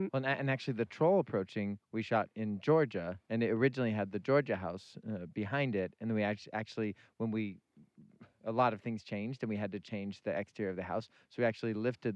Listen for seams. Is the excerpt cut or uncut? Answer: uncut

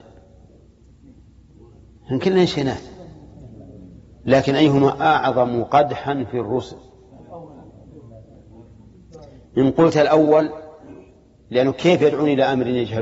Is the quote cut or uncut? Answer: uncut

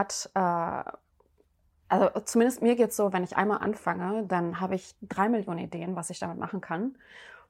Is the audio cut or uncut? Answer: uncut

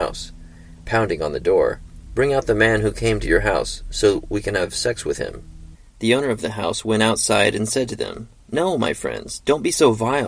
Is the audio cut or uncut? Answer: cut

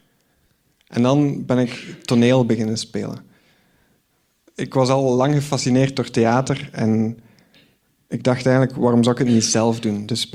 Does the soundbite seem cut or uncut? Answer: uncut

